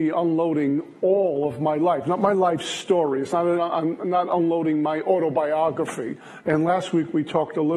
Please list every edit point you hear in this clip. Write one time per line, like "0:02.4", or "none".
0:03.6
0:06.4

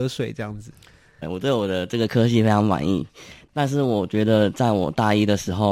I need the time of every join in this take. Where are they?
0:01.2

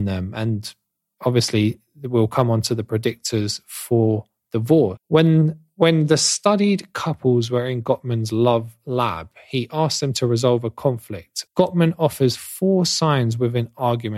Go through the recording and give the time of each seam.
0:05.0
0:11.5

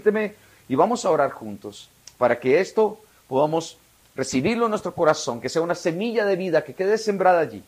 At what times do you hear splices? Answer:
none

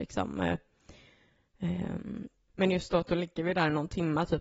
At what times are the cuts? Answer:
0:02.5

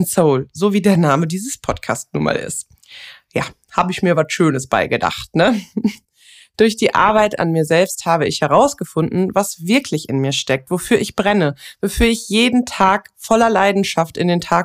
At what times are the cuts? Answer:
none

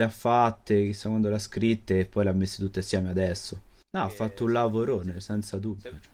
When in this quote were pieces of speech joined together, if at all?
0:03.8

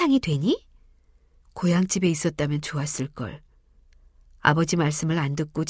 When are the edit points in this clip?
0:01.4

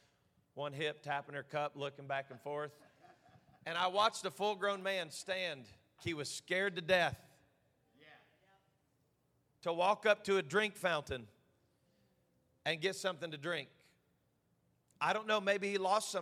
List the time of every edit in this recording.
0:06.0

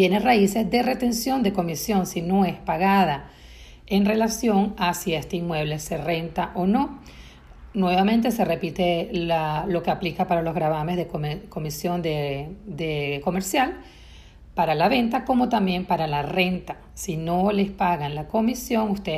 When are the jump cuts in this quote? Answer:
none

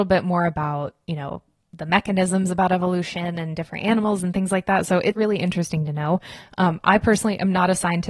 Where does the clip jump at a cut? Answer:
0:05.1

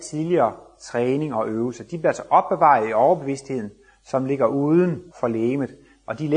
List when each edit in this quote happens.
0:05.1

